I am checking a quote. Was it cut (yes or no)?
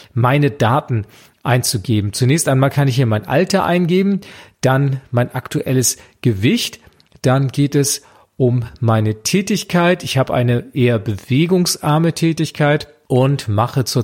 no